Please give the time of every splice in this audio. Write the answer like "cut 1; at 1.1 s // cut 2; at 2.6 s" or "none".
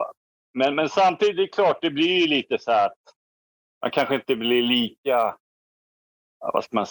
none